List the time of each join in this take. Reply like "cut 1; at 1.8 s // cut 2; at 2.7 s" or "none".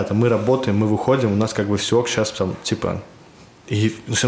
none